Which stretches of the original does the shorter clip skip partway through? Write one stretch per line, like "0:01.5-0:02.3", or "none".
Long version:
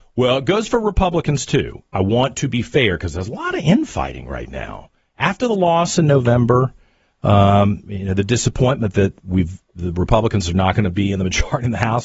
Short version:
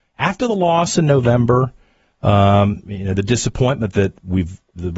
none